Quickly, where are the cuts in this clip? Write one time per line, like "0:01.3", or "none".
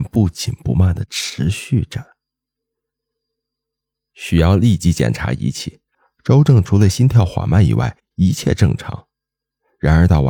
0:04.1